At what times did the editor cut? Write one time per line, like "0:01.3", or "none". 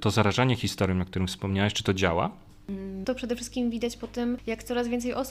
0:03.0